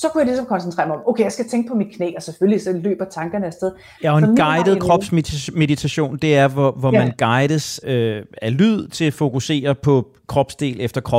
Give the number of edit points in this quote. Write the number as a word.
two